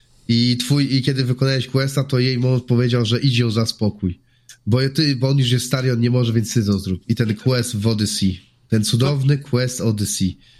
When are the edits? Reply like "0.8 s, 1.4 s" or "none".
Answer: 7.0 s